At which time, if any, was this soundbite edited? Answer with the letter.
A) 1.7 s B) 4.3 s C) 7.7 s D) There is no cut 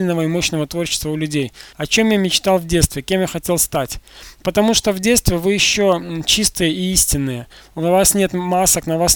A